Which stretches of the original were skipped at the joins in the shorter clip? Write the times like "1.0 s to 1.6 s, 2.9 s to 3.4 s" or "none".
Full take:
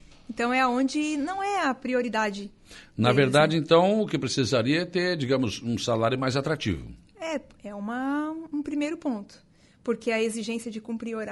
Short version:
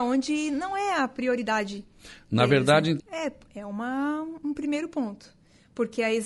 3.7 s to 7.1 s